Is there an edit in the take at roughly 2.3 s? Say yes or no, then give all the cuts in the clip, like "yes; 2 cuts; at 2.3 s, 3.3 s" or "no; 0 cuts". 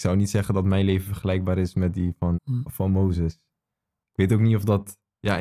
yes; 1 cut; at 2.3 s